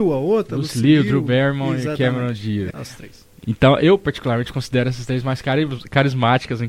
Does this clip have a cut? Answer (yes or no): yes